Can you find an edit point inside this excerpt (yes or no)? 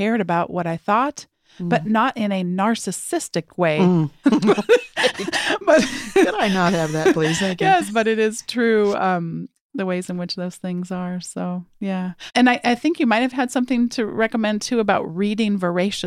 yes